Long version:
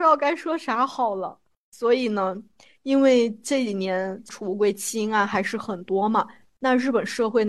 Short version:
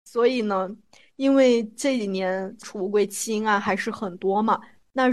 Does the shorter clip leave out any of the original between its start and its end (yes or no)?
no